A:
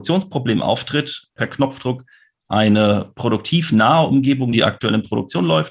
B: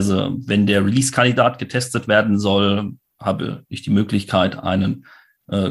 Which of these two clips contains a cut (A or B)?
A